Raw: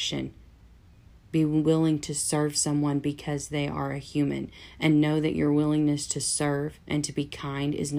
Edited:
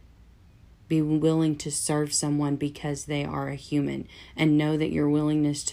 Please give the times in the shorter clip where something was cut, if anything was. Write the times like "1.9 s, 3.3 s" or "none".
none